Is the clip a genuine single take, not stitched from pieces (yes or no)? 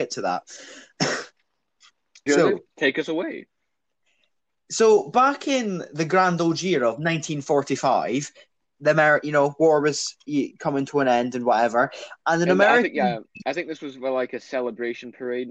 no